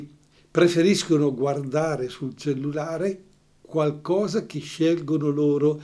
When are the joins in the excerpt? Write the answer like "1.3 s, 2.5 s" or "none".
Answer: none